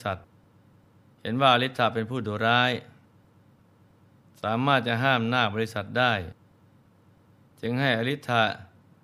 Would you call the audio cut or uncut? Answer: uncut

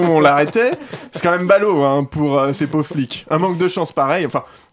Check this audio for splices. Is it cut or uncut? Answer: uncut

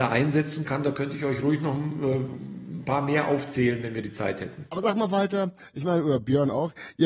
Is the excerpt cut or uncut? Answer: uncut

